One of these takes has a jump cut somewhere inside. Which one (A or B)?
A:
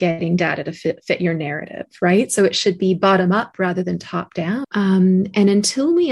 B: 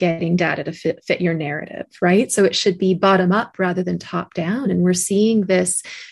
A